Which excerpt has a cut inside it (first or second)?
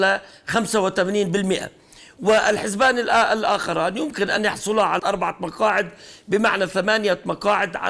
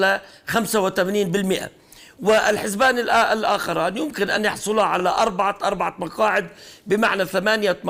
first